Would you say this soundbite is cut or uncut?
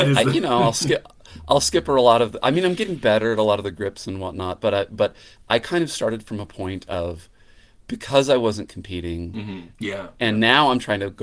cut